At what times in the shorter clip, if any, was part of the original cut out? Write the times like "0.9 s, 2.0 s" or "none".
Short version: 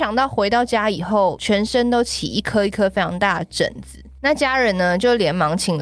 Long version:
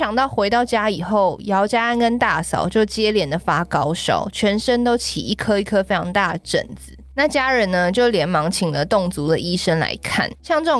1.4 s